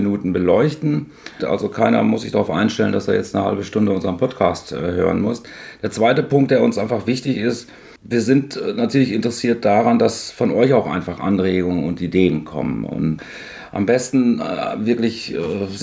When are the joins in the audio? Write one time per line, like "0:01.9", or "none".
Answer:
0:01.4